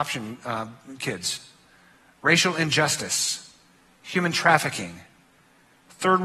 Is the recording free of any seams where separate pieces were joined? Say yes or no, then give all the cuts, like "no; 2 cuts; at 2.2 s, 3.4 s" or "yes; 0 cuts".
yes; 0 cuts